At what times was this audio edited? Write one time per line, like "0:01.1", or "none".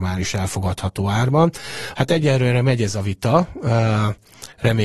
0:01.9